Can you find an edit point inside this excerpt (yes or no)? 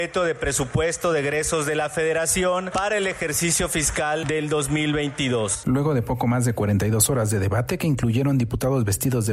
no